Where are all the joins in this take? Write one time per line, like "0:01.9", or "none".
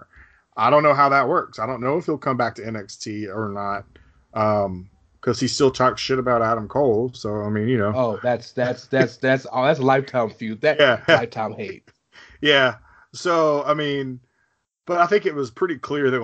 0:11.1